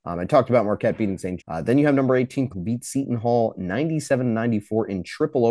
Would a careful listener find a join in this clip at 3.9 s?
no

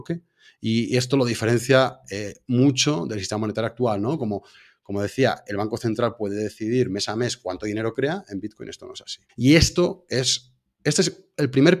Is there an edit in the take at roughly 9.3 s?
yes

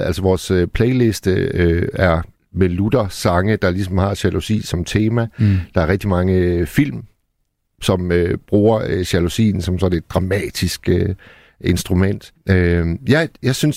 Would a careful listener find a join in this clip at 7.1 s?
no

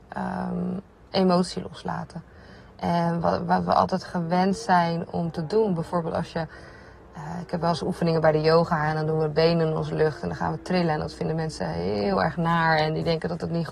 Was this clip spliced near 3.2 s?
no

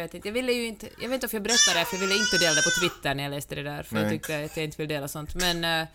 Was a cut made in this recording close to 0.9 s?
no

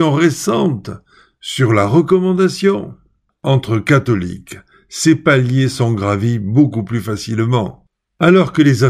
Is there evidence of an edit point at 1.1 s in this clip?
no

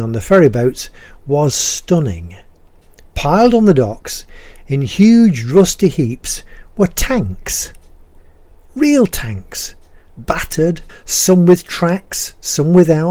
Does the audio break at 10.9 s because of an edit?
yes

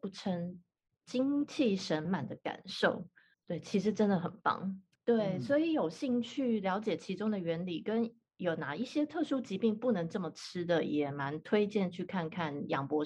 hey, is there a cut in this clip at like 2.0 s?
yes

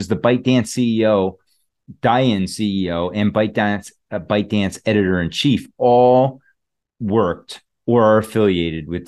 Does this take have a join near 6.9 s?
no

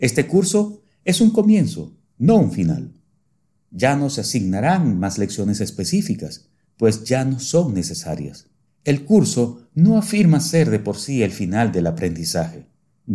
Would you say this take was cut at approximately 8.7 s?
yes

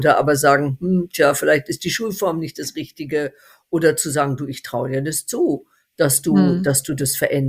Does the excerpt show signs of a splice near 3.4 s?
no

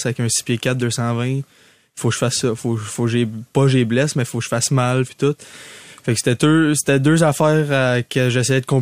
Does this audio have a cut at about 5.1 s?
yes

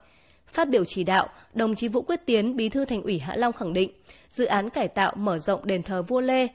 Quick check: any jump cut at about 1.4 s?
no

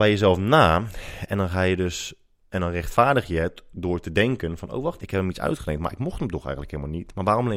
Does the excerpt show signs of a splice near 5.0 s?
yes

